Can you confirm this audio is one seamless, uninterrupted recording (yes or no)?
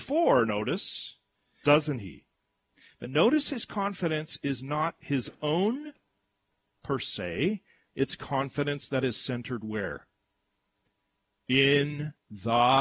no